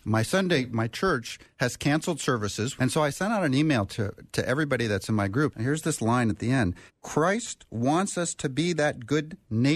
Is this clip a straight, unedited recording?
no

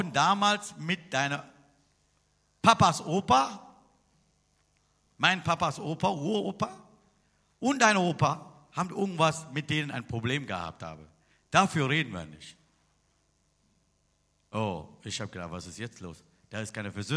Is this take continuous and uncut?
yes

